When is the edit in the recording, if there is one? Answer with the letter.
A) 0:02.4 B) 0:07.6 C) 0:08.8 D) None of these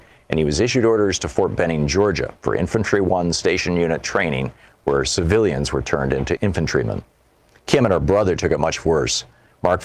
B